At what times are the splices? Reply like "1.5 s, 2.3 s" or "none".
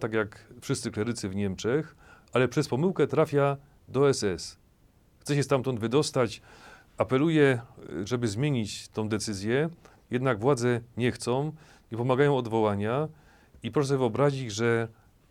none

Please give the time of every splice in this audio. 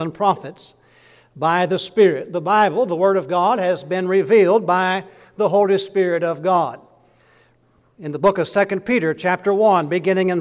none

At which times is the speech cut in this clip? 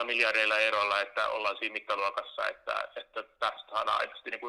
none

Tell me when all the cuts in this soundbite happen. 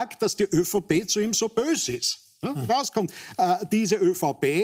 2.7 s

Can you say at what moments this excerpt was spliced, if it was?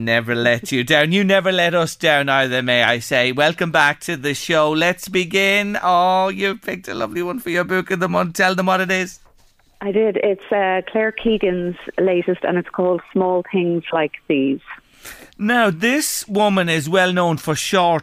none

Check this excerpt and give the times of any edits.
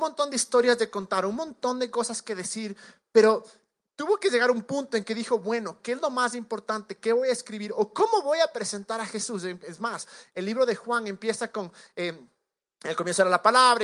none

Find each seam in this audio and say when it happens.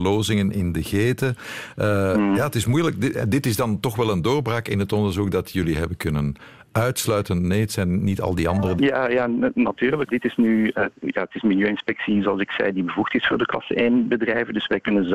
8.8 s, 10.1 s

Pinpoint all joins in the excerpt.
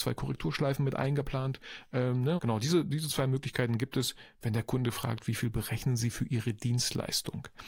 2.4 s

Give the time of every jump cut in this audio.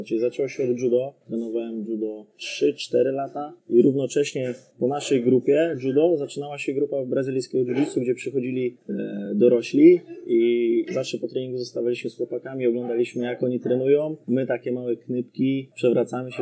none

